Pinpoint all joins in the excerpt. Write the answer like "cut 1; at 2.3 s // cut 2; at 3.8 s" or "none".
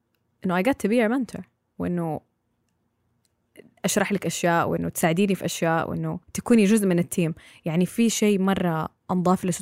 cut 1; at 6.2 s